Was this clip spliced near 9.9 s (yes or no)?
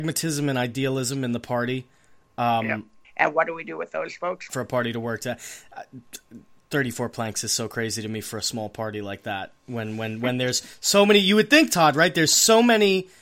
no